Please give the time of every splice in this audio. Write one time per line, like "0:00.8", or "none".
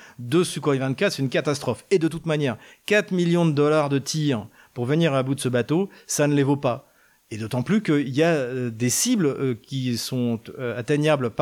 none